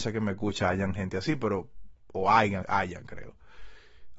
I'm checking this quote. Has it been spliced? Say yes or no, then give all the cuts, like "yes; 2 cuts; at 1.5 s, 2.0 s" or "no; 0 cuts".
yes; 1 cut; at 2.6 s